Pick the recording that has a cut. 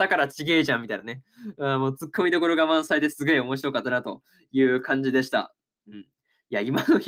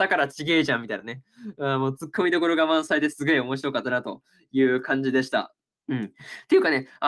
second; 1 cut; at 5.7 s

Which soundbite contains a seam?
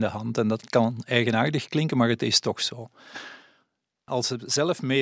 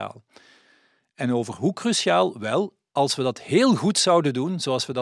first; 1 cut; at 4.1 s

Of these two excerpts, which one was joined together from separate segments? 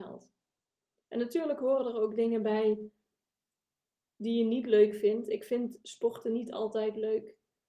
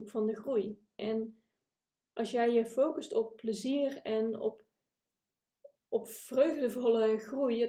second; 1 cut; at 1.0 s

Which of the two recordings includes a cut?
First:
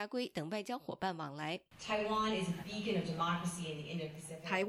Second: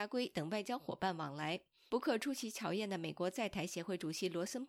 first; 1 cut; at 1.7 s

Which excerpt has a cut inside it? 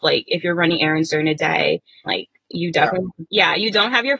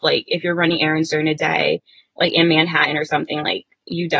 first; 2 cuts; at 2.1 s, 3.3 s

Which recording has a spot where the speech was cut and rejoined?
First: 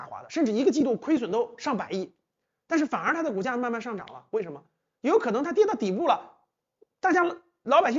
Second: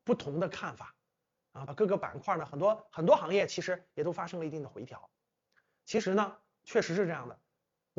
second; 1 cut; at 1.7 s

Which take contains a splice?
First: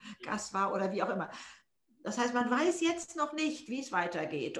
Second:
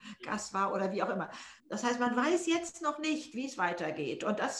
second; 1 cut; at 1.6 s

